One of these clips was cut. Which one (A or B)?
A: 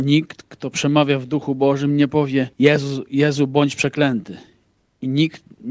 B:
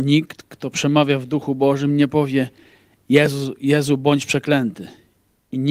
A